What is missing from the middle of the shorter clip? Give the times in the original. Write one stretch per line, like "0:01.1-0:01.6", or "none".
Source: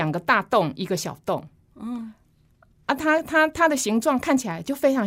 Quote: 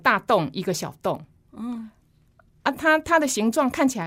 0:03.0-0:03.2